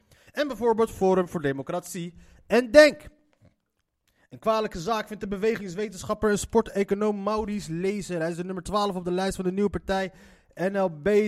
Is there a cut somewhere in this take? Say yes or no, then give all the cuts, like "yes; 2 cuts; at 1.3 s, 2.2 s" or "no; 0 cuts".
no; 0 cuts